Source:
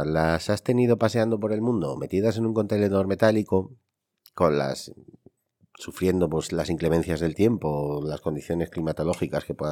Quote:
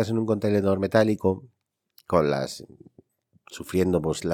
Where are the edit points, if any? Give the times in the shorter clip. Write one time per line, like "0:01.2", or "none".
none